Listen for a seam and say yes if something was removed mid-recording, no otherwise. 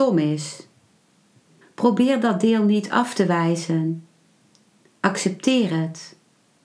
yes